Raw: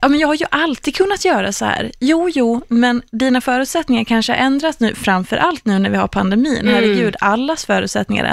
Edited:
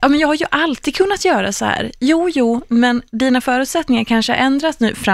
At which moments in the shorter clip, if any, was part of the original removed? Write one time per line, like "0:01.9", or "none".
none